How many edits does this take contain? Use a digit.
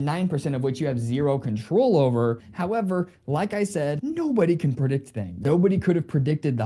2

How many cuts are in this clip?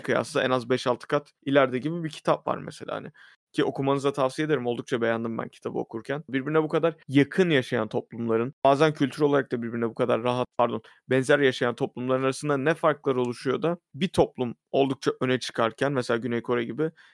1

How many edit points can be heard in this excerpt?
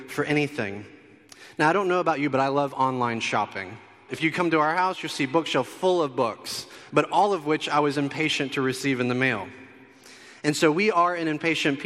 2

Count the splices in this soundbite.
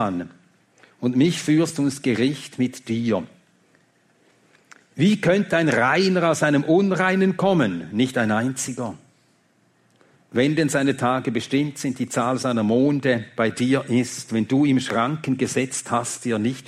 0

